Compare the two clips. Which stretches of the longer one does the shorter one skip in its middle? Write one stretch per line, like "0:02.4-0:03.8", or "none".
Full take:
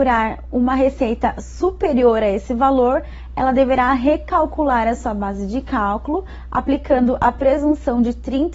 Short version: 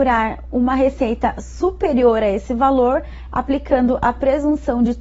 0:03.3-0:06.5